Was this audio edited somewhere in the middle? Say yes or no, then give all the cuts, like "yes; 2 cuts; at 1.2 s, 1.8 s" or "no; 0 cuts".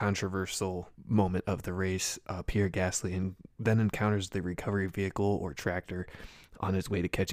yes; 1 cut; at 0.9 s